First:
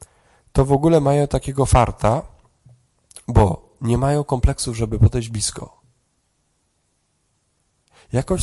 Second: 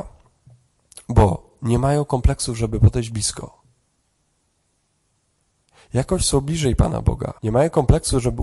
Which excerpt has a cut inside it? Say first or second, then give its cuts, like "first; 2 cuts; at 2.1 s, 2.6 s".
second; 1 cut; at 7.4 s